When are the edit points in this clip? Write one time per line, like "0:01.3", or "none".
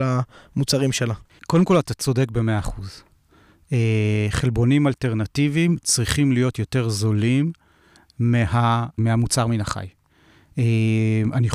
0:09.0